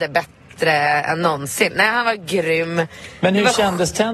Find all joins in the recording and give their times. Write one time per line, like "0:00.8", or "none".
none

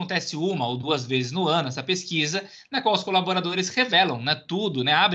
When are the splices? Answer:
none

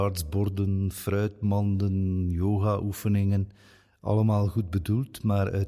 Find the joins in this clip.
none

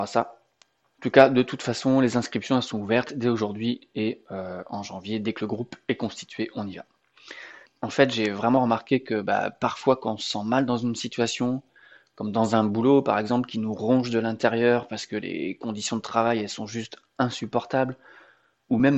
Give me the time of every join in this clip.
0:07.7

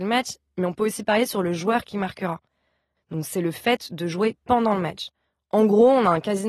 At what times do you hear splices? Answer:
0:03.0

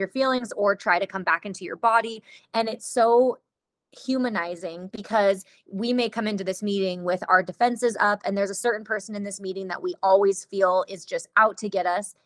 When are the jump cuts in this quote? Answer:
0:02.4

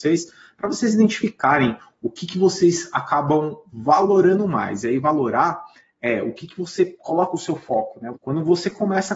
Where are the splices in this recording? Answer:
0:08.1

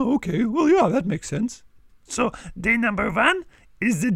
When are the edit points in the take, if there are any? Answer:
0:01.9

